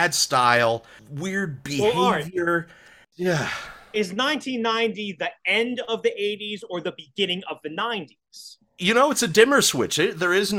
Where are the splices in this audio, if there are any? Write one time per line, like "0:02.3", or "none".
0:01.0
0:03.1